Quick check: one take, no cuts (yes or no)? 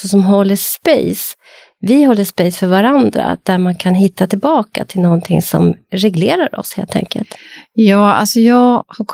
yes